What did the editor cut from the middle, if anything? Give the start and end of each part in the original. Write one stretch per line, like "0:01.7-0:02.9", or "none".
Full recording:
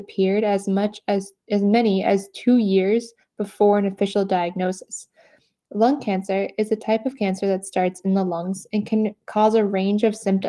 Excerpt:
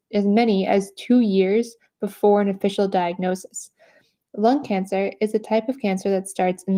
none